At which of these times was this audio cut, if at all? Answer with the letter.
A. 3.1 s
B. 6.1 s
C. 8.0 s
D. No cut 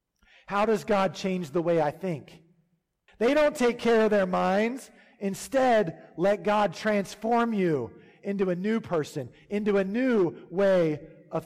A